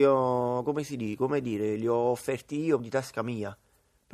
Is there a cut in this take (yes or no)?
yes